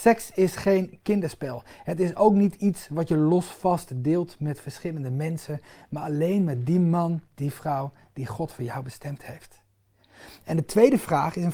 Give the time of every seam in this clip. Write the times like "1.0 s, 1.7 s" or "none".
none